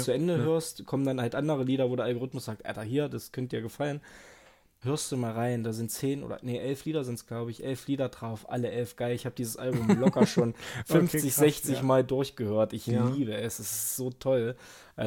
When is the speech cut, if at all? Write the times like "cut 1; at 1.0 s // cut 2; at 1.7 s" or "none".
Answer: cut 1; at 4.8 s